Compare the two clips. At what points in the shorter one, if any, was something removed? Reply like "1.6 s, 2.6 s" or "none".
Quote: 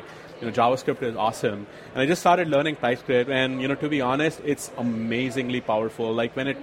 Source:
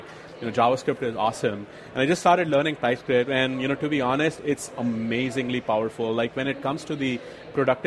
none